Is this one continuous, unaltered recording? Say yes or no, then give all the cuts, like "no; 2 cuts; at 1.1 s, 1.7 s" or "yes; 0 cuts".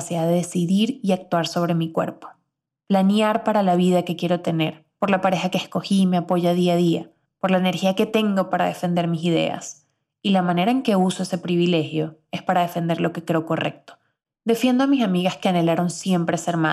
no; 1 cut; at 14.3 s